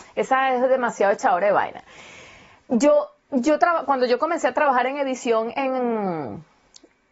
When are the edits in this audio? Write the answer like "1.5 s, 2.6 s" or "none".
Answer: none